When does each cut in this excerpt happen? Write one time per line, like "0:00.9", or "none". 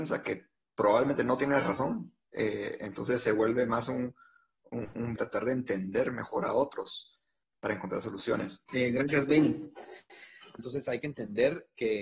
0:05.2
0:08.7
0:10.6